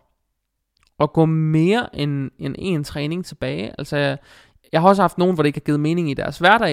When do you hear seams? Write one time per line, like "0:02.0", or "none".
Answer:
none

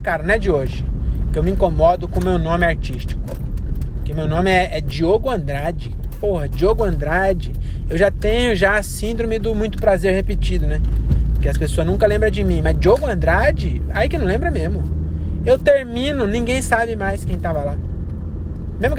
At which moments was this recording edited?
none

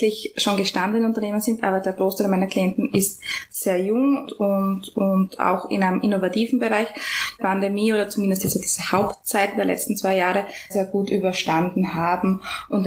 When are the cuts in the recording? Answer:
0:04.2
0:07.4
0:10.7

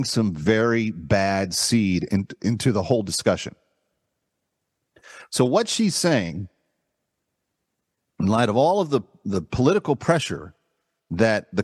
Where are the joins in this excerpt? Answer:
none

